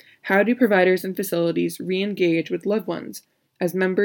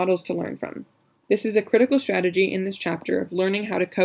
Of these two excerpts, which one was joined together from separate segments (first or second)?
second